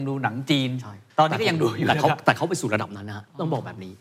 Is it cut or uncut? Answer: cut